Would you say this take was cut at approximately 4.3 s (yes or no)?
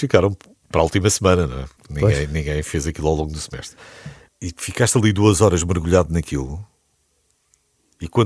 yes